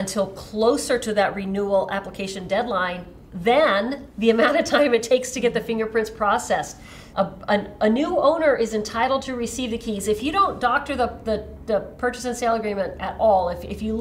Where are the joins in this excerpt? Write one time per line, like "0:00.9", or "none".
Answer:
0:07.1

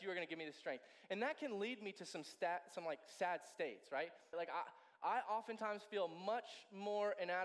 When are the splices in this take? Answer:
0:04.3

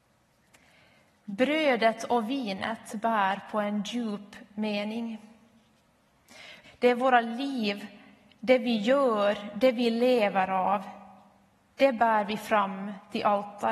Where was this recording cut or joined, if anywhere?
0:06.6

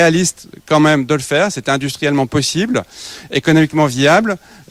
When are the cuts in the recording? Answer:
none

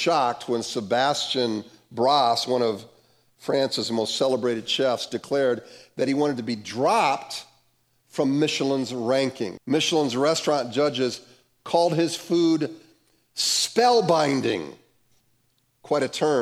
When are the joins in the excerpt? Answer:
0:09.6

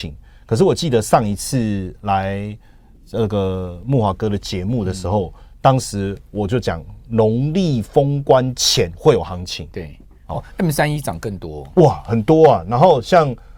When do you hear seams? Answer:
0:09.7

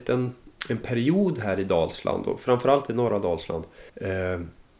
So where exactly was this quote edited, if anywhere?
0:03.9

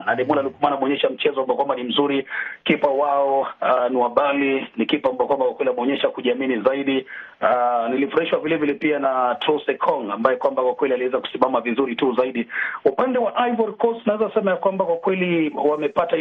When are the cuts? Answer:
none

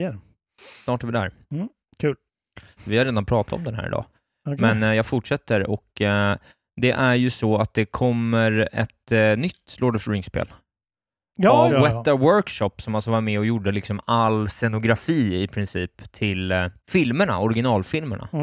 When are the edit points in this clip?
0:02.8
0:11.7
0:16.8

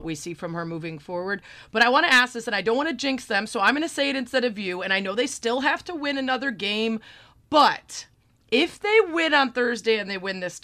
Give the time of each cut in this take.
none

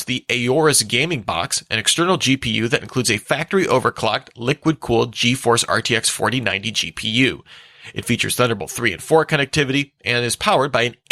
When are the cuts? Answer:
none

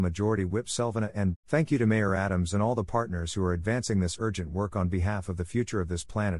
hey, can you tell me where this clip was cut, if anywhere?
0:01.3

